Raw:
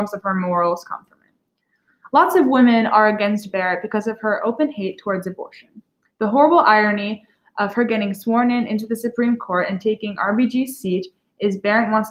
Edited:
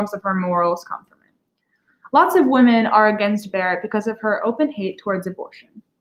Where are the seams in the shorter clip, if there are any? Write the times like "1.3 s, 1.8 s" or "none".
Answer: none